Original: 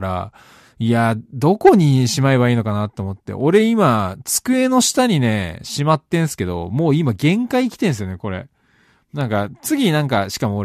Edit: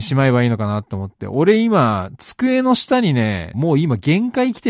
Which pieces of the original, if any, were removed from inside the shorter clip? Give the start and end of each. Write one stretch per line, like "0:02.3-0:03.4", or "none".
0:05.6-0:06.7